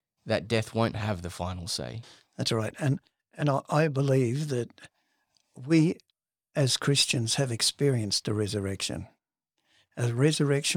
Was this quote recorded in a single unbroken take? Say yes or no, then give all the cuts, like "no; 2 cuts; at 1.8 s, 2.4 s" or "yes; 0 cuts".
yes; 0 cuts